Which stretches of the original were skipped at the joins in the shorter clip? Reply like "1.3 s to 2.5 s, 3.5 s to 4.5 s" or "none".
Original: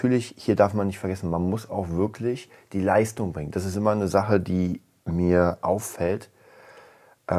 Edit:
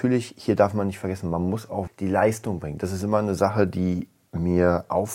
1.9 s to 2.6 s